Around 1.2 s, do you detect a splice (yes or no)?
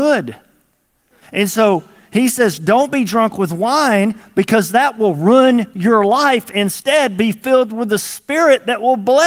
yes